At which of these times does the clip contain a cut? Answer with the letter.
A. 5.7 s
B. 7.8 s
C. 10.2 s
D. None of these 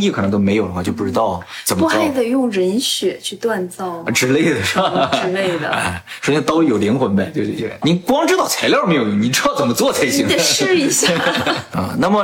B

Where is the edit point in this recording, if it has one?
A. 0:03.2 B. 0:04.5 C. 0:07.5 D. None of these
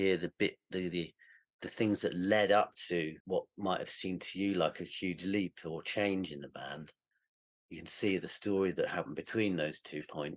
A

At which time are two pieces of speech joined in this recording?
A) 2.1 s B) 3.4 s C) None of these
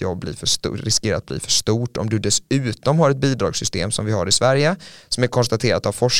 C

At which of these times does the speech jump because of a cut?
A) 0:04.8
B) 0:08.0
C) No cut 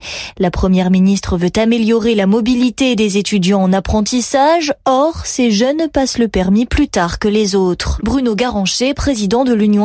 B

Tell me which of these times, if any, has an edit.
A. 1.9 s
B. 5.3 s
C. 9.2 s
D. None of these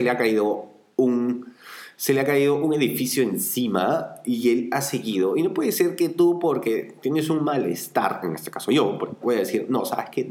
C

